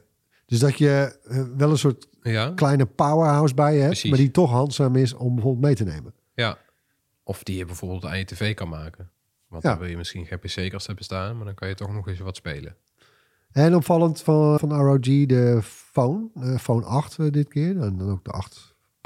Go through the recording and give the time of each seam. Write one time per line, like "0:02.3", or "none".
0:14.6